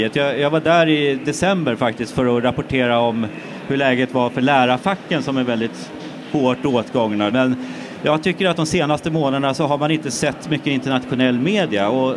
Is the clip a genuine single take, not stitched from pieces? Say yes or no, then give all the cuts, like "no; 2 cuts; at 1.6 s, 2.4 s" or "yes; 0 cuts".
no; 1 cut; at 7.3 s